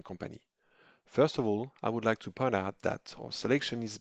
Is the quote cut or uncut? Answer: uncut